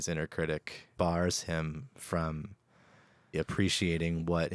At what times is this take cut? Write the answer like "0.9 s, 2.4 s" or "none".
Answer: 3.3 s